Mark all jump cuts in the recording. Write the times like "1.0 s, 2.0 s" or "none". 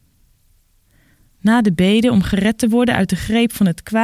none